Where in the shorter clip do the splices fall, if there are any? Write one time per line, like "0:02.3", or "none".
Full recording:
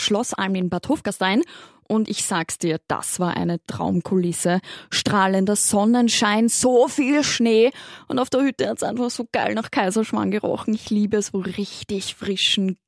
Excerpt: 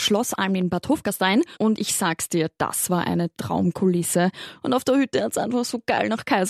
0:01.5
0:04.6